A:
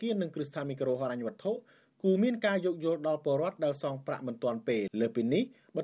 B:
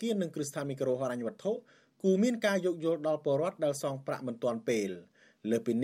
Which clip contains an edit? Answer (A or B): A